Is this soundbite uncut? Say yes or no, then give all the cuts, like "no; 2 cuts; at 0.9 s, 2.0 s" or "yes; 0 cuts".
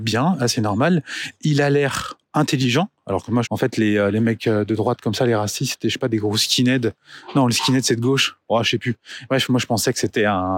no; 1 cut; at 3.4 s